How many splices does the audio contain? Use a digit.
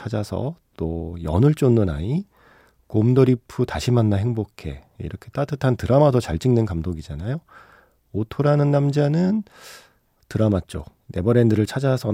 1